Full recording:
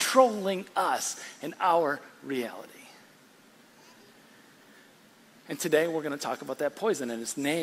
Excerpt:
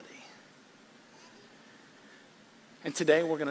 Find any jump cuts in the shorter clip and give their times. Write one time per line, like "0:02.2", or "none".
none